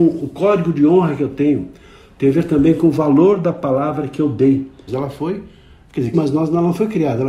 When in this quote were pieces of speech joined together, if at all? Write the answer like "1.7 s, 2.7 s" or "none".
4.9 s, 6.1 s